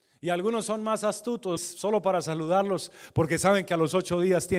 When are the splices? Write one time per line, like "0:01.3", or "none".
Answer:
0:01.6